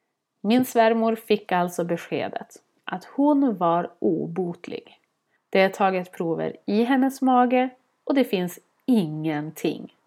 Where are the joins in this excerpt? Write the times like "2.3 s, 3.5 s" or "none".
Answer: 5.4 s